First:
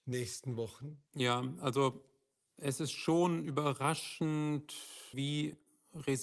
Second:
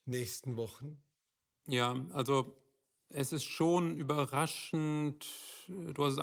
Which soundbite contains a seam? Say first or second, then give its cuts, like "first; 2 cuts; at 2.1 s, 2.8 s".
first; 2 cuts; at 1.1 s, 5.1 s